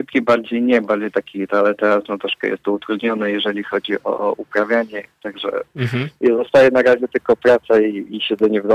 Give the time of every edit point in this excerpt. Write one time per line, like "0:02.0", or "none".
0:01.5